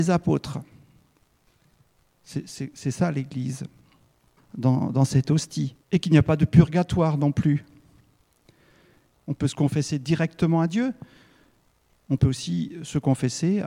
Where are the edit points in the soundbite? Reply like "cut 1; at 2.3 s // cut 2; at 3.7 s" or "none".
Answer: cut 1; at 4.4 s // cut 2; at 5.8 s // cut 3; at 9.2 s